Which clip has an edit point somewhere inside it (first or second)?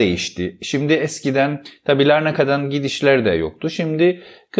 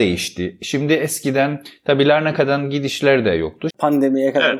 second